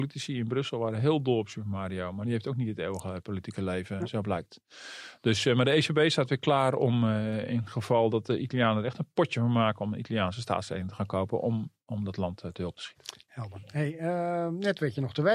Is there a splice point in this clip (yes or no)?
no